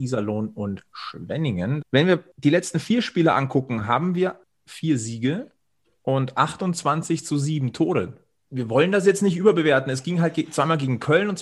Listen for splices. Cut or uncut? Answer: cut